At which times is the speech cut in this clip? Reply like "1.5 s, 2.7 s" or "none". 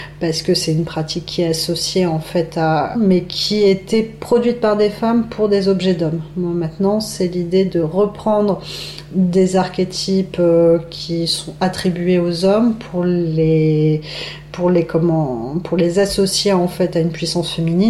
2.9 s